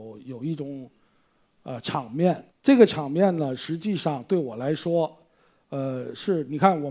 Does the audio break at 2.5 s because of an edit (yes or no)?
yes